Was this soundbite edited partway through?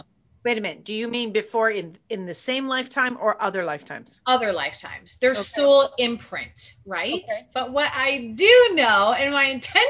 yes; 1 cut; at 7.5 s

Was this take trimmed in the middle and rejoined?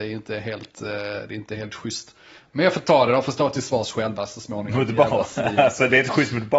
no; 0 cuts

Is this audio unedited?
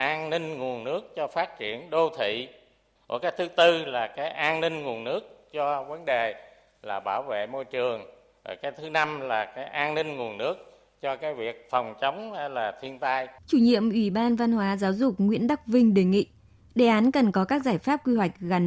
no; 1 cut; at 13.4 s

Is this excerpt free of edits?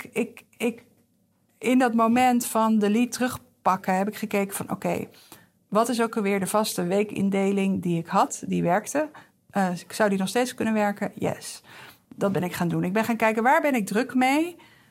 yes; 0 cuts

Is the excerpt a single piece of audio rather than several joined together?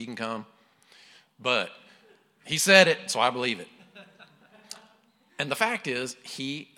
yes; 0 cuts

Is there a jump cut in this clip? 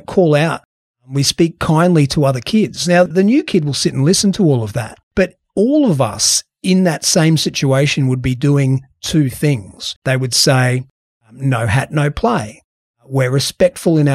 yes; 3 cuts; at 3.1 s, 5.1 s, 10.0 s

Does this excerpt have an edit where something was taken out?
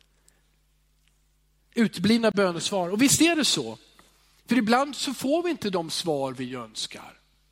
no; 0 cuts

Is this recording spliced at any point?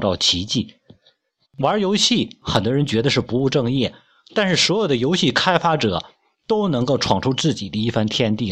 yes; 1 cut; at 1.4 s

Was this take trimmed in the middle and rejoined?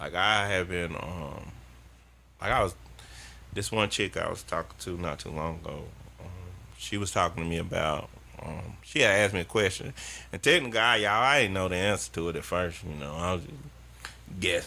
no; 0 cuts

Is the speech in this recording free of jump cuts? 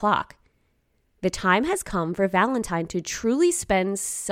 yes; 0 cuts

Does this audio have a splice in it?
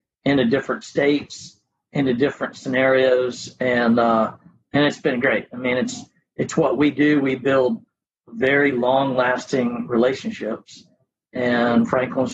no; 0 cuts

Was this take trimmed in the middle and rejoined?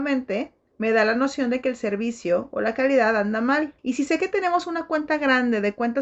yes; 1 cut; at 3.8 s

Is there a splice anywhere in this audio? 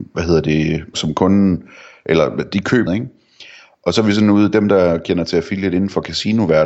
yes; 2 cuts; at 0.9 s, 2.9 s

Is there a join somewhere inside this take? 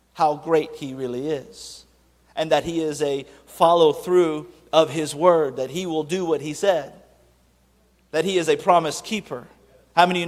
no; 0 cuts

